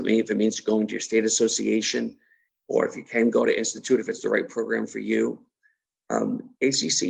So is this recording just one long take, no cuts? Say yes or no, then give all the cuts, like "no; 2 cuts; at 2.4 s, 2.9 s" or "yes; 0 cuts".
yes; 0 cuts